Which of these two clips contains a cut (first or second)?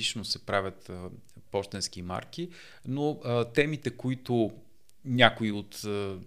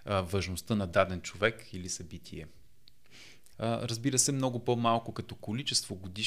second